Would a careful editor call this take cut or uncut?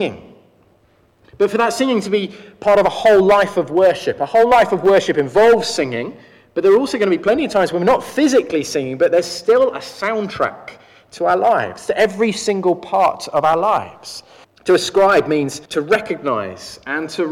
cut